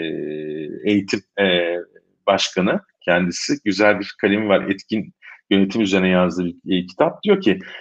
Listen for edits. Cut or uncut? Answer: uncut